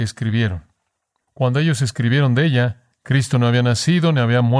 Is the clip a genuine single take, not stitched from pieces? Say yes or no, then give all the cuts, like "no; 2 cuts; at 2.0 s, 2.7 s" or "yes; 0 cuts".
no; 1 cut; at 1.2 s